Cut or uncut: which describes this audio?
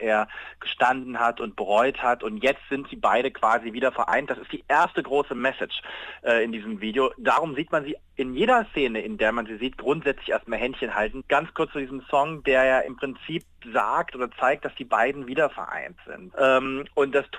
cut